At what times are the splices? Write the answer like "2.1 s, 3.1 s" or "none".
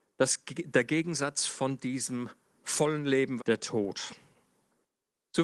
3.4 s